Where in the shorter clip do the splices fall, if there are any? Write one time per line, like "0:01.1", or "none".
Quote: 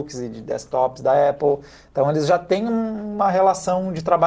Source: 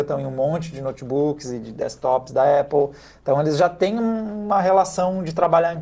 none